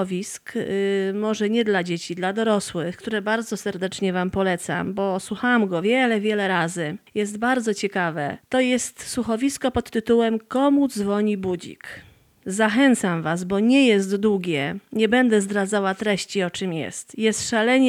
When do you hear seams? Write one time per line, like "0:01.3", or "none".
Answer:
none